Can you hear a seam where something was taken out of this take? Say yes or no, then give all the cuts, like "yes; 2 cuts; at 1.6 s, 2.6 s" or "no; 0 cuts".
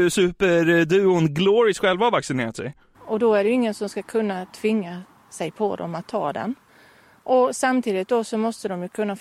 yes; 1 cut; at 2.9 s